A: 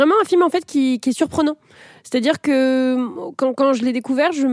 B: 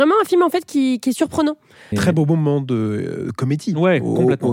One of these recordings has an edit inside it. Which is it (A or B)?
B